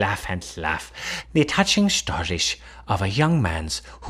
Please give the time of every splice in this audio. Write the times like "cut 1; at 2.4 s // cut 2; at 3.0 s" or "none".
cut 1; at 1.2 s